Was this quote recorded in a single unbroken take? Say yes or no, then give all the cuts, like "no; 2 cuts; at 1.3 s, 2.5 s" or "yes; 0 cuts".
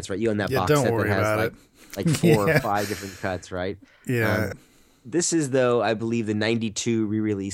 no; 1 cut; at 4.5 s